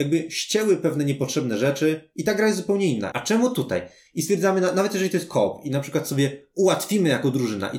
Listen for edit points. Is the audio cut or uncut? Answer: cut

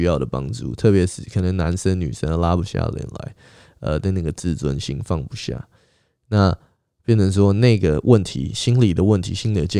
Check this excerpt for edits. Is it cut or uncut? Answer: uncut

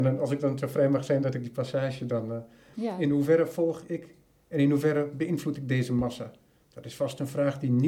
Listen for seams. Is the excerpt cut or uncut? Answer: cut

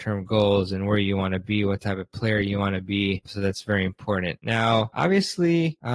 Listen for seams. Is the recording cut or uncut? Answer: uncut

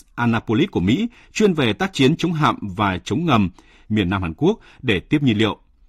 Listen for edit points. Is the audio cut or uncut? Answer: cut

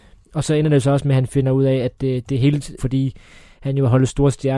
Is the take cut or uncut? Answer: cut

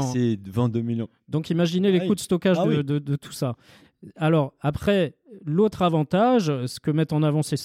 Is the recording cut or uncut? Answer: uncut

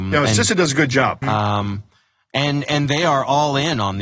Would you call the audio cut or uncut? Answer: cut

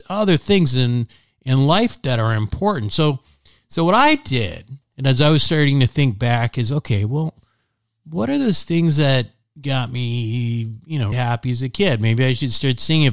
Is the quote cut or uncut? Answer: cut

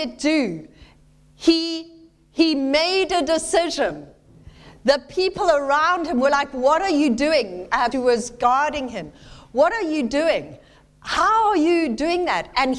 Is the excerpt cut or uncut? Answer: cut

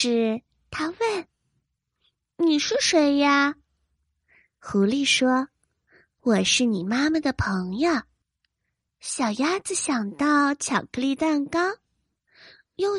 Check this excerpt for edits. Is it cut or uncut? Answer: cut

